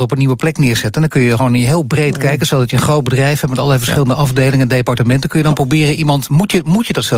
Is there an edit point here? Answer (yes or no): no